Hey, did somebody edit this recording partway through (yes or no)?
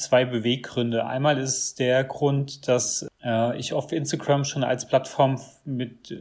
no